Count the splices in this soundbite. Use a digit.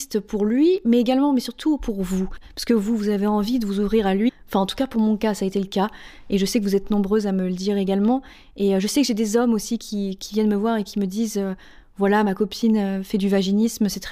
0